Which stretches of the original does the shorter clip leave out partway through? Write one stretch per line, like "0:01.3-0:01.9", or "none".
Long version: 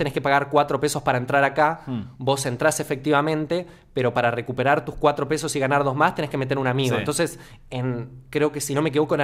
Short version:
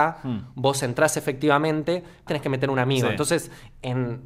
0:03.9-0:06.2